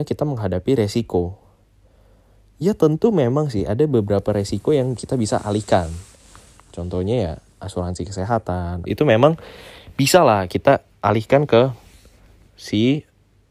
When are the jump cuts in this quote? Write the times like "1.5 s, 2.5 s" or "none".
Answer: 8.9 s